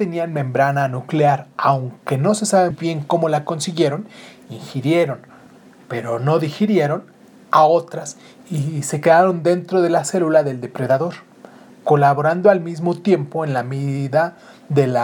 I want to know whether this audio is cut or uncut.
cut